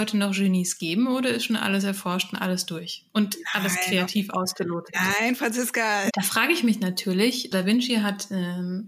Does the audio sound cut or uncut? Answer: cut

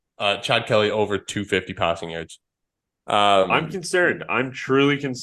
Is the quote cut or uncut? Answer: cut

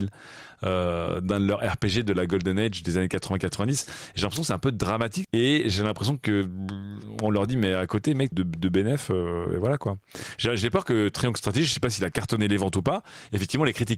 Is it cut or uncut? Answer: cut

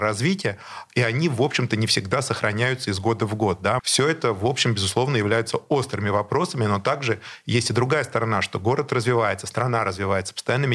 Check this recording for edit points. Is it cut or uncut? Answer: cut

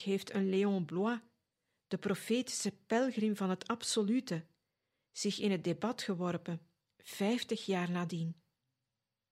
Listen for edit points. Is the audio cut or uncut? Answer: uncut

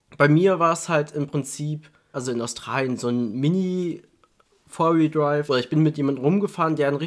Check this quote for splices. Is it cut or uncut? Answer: cut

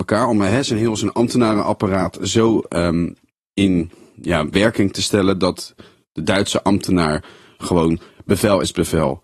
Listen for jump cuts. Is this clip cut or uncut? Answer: uncut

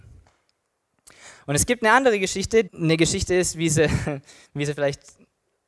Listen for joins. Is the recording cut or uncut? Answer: cut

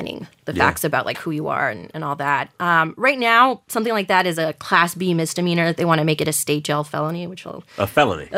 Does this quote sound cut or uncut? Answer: uncut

